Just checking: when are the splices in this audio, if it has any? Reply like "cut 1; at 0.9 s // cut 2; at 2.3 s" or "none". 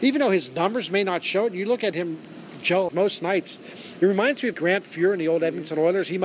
cut 1; at 2.9 s // cut 2; at 4.5 s